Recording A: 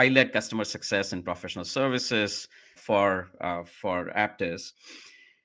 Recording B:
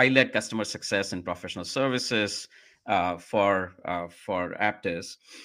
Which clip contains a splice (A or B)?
A